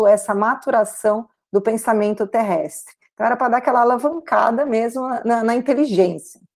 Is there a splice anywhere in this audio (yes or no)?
no